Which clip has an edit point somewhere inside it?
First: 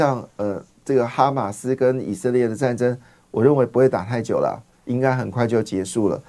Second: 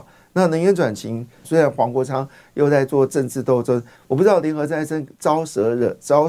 second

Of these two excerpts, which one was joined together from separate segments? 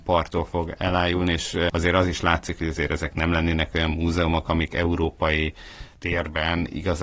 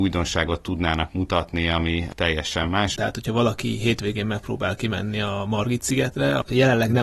second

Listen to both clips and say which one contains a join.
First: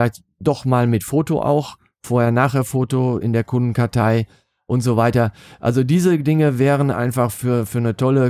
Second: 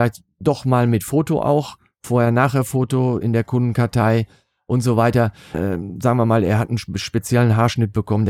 second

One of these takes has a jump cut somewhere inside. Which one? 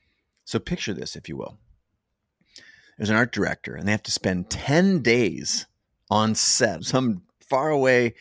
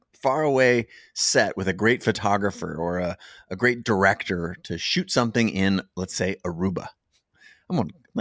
first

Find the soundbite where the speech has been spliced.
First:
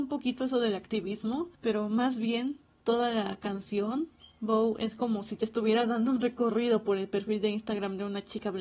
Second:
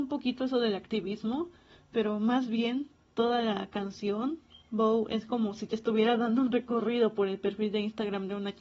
first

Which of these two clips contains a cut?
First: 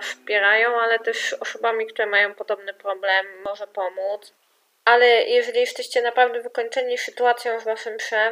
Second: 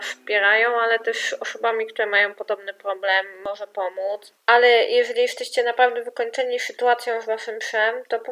second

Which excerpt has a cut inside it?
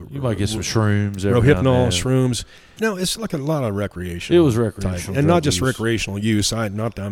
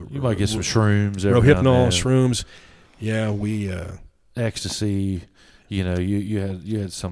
first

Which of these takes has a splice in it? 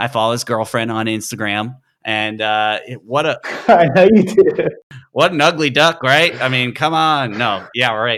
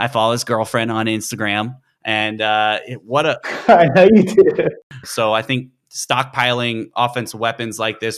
second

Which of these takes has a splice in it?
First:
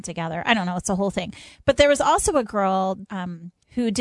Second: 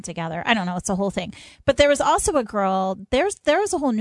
first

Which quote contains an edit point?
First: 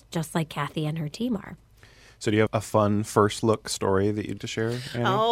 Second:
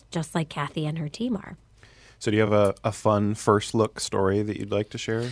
first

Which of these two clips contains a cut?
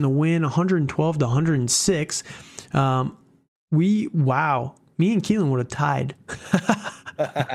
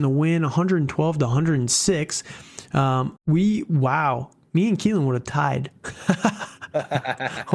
second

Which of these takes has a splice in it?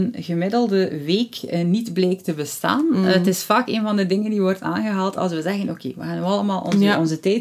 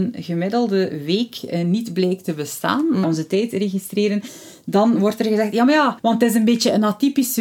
second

